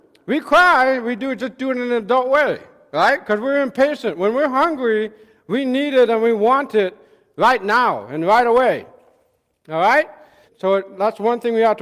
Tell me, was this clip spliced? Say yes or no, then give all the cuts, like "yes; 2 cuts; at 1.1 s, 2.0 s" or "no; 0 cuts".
yes; 1 cut; at 10.5 s